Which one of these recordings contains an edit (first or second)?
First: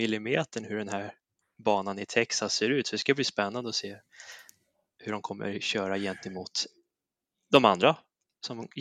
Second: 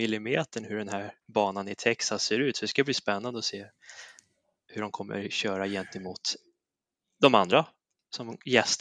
second